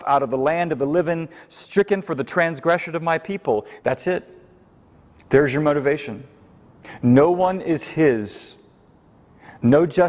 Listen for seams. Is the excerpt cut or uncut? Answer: cut